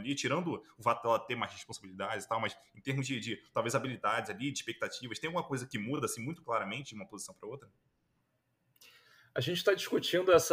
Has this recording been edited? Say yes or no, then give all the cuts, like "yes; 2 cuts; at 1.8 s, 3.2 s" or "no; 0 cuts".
no; 0 cuts